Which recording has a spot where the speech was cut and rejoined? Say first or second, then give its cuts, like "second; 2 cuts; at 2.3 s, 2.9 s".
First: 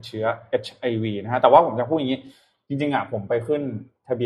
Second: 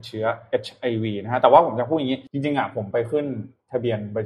second; 1 cut; at 2.3 s